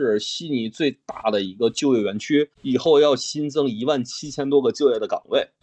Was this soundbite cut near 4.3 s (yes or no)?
no